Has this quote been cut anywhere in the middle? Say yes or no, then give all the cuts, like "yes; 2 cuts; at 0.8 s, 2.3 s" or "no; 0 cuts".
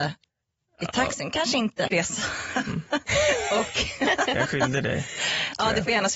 yes; 1 cut; at 1.9 s